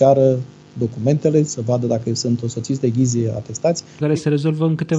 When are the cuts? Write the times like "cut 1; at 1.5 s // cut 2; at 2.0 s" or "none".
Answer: cut 1; at 4.0 s